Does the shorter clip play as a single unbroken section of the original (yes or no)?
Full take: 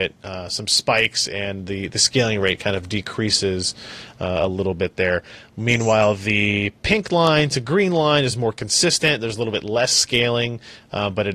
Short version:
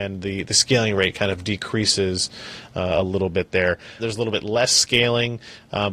no